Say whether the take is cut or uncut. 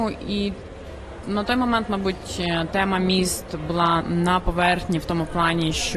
cut